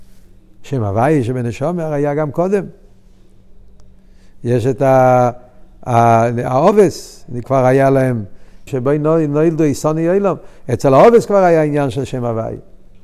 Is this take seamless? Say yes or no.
no